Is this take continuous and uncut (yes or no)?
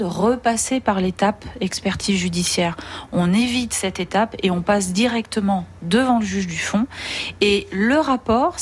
yes